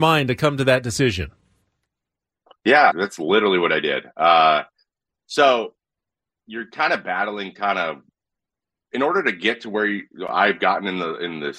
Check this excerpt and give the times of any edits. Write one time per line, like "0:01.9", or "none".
0:02.9